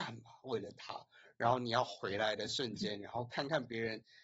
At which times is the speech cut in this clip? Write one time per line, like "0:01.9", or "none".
none